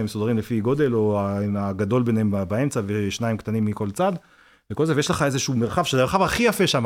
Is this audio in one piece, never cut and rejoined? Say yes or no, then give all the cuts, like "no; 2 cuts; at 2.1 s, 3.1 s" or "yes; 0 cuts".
yes; 0 cuts